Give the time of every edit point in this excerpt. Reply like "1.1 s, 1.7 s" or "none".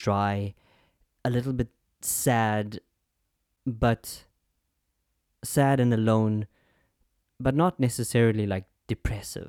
none